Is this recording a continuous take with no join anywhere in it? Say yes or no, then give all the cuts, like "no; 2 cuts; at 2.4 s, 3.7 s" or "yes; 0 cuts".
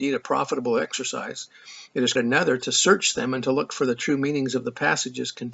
no; 1 cut; at 2.2 s